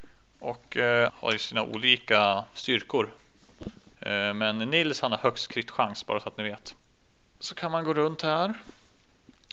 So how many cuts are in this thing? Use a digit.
3